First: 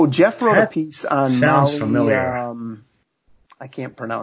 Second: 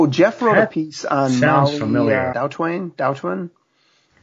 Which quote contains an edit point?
second; 1 cut; at 2.3 s

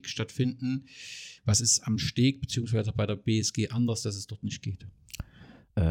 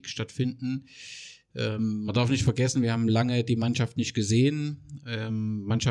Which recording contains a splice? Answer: first; 1 cut; at 1.4 s

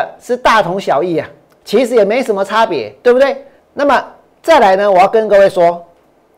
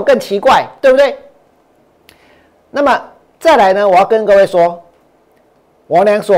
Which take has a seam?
first; 1 cut; at 3.6 s

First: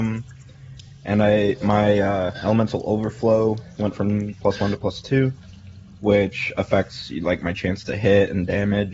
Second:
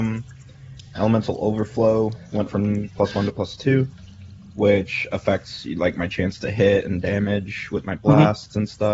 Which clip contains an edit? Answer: second; 1 cut; at 0.9 s

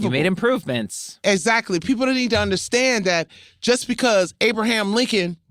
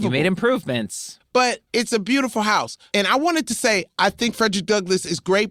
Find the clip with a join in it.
second; 2 cuts; at 1.2 s, 2.9 s

